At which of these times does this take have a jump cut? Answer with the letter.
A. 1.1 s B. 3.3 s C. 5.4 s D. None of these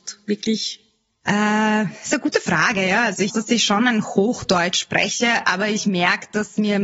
B